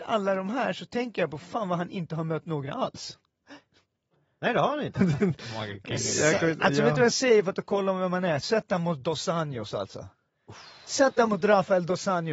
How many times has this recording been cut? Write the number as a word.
one